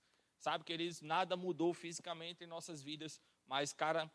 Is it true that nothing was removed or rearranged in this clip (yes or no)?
yes